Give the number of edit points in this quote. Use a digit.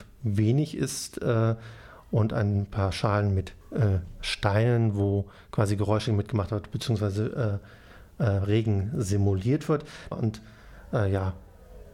2